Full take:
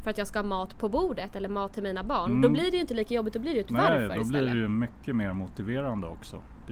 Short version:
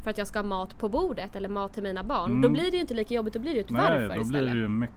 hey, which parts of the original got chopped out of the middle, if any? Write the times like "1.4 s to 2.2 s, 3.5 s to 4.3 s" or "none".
none